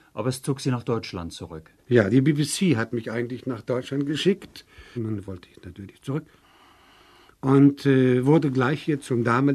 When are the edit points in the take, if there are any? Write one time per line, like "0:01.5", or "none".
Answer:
0:05.0